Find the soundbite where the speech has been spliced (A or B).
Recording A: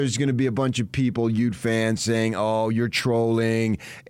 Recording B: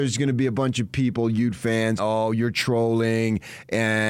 B